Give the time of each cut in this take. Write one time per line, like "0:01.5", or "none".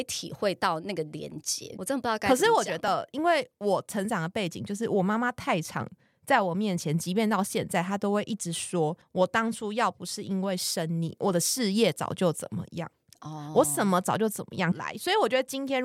0:14.7